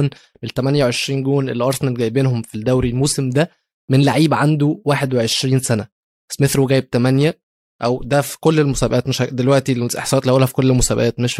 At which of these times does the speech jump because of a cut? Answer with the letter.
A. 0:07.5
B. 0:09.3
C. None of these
C